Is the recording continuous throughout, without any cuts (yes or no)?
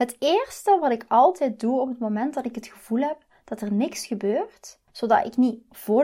no